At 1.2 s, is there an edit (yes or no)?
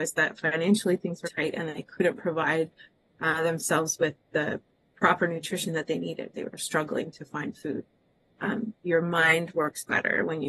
yes